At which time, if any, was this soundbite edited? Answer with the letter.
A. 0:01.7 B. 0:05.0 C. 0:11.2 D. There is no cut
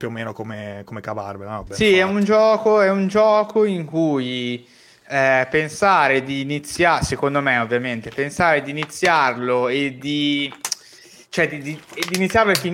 A